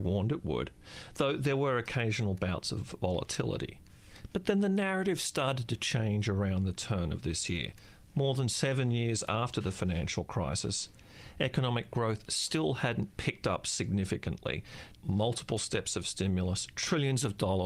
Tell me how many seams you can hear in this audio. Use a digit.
1